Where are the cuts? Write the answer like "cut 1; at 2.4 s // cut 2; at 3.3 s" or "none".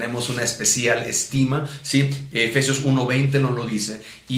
cut 1; at 2.3 s

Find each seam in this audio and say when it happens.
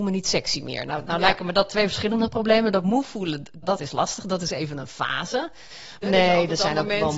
cut 1; at 3.6 s // cut 2; at 6.0 s

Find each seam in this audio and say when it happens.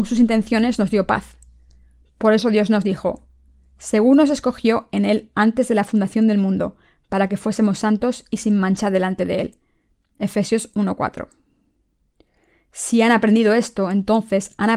none

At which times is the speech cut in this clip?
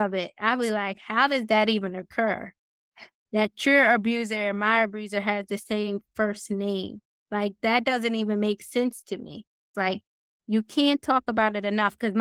cut 1; at 9.7 s

